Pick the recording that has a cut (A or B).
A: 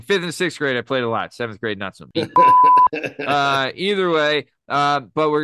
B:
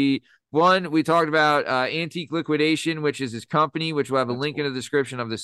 A